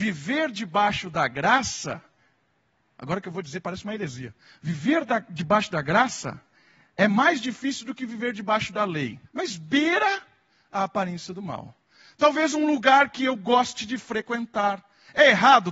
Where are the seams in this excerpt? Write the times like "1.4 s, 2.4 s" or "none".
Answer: 9.3 s